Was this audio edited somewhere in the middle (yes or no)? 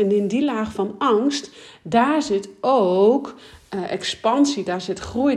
no